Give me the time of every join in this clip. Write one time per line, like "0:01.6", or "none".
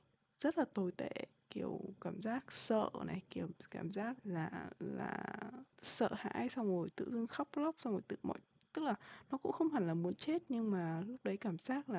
0:04.2
0:05.7